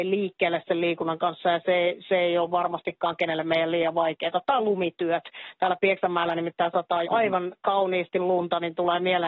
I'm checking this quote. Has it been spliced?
yes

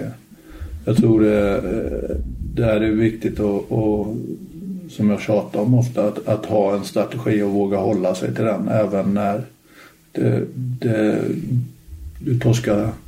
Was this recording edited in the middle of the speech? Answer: no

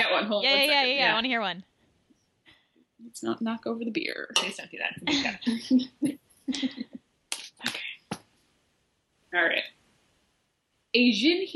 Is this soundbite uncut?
yes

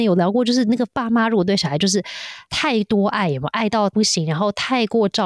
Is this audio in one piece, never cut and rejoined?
yes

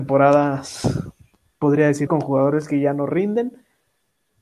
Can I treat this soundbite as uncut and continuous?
no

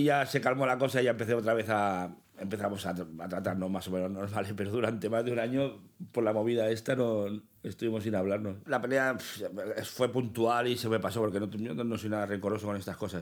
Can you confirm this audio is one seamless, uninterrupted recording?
yes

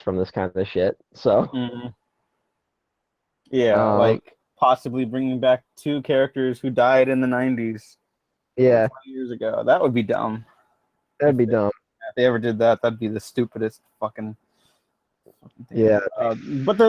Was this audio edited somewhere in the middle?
no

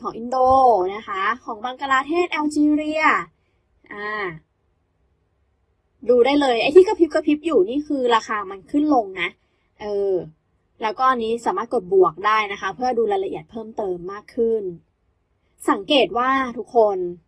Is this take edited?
no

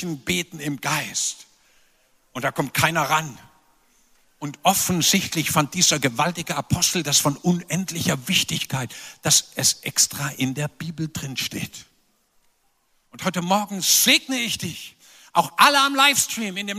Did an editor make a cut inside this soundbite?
no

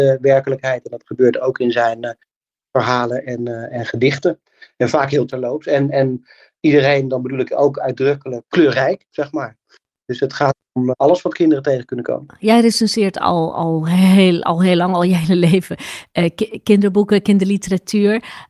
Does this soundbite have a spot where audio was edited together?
no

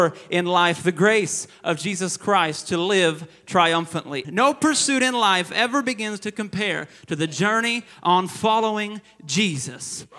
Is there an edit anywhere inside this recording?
yes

